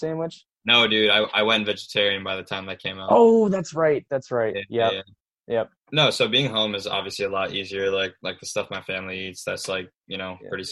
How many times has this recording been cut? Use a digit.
1